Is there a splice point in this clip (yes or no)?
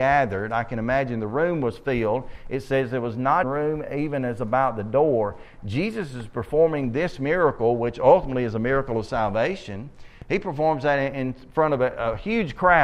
yes